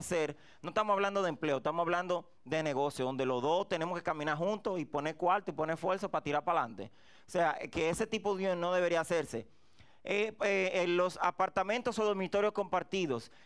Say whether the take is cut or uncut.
uncut